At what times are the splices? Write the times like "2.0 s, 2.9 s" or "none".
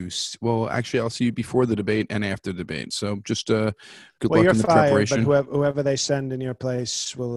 none